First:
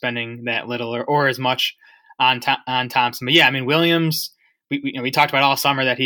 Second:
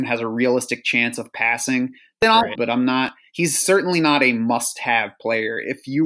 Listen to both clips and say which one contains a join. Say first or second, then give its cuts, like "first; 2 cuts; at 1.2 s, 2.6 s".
second; 1 cut; at 2.6 s